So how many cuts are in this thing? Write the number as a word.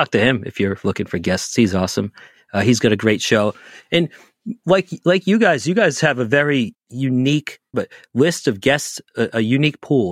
one